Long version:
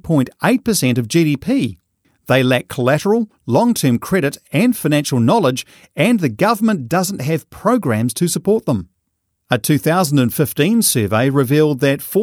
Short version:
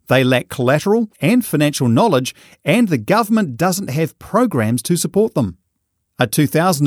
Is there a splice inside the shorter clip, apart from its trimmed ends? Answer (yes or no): yes